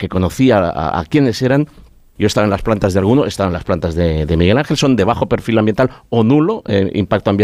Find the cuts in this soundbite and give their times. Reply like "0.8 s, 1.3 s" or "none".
2.2 s